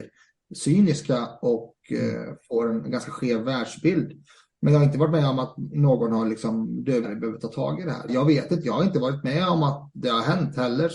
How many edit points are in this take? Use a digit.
2